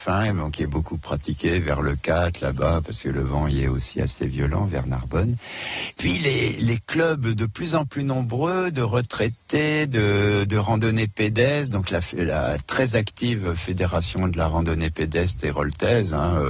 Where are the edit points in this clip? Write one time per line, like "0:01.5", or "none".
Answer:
none